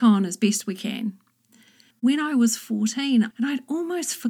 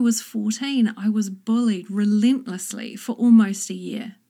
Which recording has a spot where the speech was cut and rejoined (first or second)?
first